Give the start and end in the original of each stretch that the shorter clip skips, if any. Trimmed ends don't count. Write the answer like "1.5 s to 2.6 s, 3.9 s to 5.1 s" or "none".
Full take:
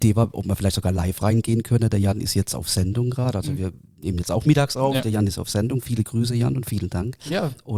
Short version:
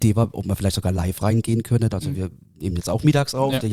1.9 s to 3.3 s